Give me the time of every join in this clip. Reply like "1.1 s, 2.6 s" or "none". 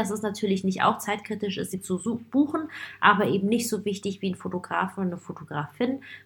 none